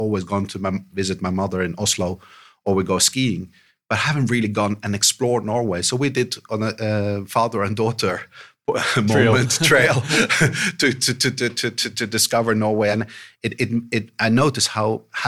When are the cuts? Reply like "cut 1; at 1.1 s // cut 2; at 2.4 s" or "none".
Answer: none